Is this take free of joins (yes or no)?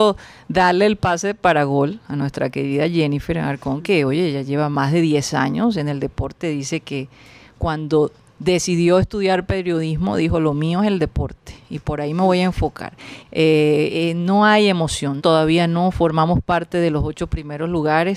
no